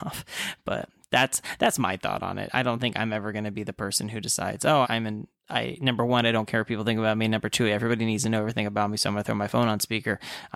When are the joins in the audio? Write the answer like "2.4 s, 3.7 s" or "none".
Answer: 4.8 s